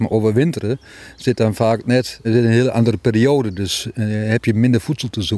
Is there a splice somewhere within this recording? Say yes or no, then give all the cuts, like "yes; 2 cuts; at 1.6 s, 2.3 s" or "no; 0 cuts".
yes; 1 cut; at 2.2 s